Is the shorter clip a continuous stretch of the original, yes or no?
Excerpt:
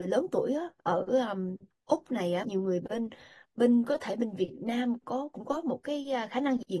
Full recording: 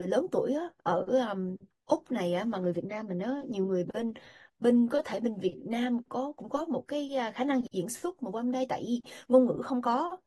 no